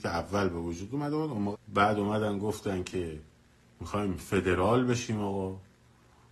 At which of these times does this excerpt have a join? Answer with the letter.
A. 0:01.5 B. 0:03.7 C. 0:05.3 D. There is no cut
A